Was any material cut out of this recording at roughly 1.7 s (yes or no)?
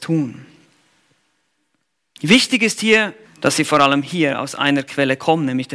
no